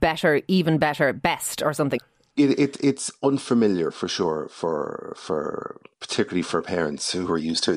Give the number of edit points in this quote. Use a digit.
2